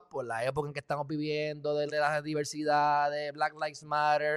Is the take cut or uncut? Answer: cut